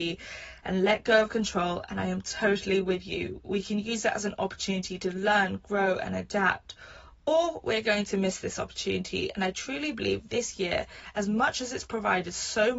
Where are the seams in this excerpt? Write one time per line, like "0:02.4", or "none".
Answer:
none